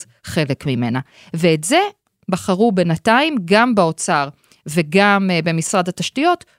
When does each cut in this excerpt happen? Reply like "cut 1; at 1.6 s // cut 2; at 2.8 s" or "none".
none